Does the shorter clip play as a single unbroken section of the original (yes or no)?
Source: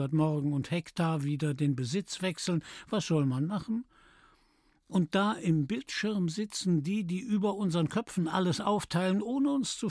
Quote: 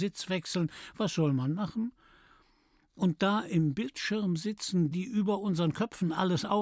no